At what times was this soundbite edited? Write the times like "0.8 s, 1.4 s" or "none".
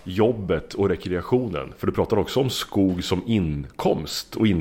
none